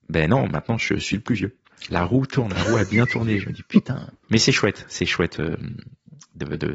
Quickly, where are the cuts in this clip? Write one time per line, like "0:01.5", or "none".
0:01.9
0:04.2